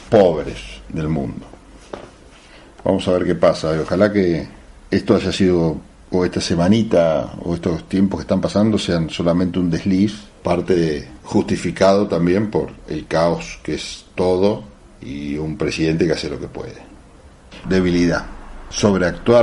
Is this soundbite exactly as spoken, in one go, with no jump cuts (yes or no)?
no